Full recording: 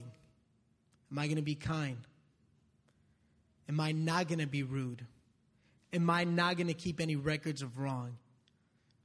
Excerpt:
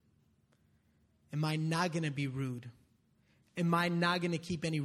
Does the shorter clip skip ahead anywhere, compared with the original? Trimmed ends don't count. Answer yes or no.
no